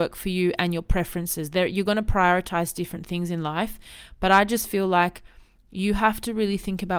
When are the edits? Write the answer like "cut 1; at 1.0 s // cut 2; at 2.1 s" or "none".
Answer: none

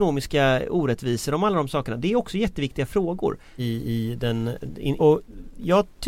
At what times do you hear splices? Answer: cut 1; at 3.6 s // cut 2; at 5.0 s

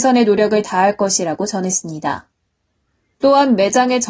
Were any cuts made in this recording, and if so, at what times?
cut 1; at 3.2 s

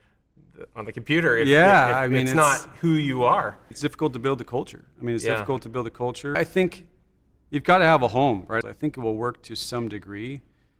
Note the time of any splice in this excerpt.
cut 1; at 3.7 s // cut 2; at 6.3 s // cut 3; at 8.6 s

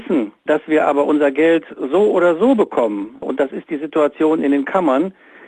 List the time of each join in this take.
none

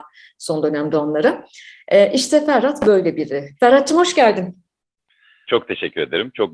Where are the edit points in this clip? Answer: cut 1; at 3.6 s // cut 2; at 5.4 s

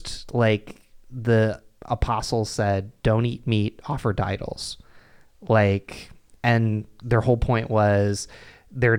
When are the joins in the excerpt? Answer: none

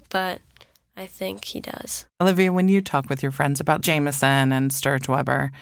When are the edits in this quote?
cut 1; at 2.1 s

